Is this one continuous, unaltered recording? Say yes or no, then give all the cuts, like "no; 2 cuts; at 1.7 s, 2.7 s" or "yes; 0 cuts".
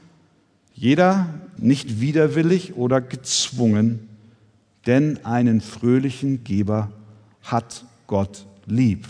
no; 1 cut; at 1.6 s